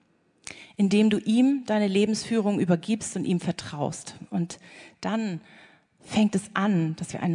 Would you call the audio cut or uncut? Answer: uncut